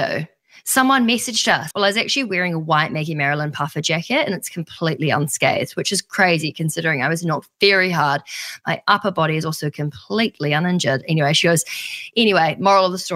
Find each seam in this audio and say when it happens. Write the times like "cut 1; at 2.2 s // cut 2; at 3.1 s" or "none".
cut 1; at 1.7 s

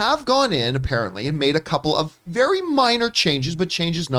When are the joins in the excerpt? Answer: none

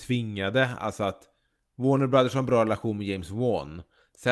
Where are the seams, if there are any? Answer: none

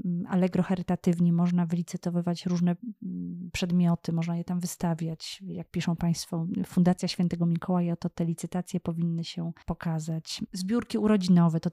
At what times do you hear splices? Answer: none

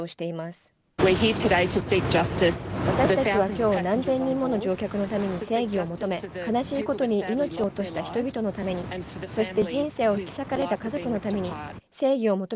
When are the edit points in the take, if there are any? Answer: cut 1; at 1.0 s

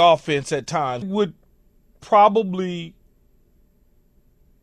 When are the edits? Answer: cut 1; at 1.0 s

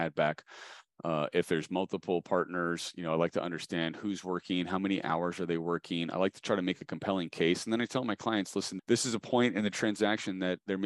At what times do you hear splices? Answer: none

